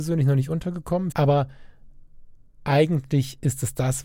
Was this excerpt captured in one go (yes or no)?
no